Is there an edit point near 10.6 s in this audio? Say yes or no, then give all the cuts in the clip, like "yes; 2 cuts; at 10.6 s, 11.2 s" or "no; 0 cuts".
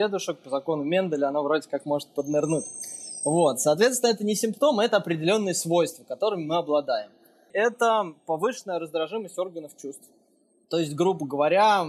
no; 1 cut; at 7.5 s